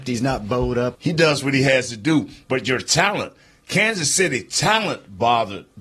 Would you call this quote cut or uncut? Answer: cut